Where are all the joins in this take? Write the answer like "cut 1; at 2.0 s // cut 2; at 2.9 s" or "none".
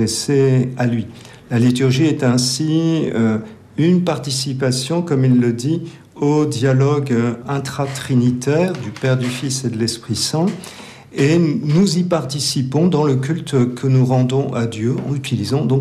none